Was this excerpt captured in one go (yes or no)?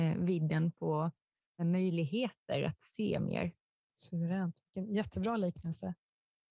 yes